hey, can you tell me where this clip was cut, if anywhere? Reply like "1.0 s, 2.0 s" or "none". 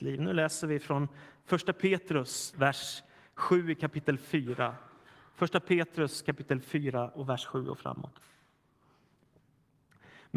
2.5 s